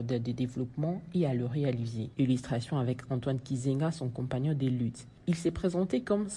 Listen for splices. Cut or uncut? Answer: cut